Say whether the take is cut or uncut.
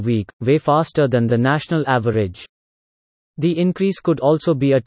uncut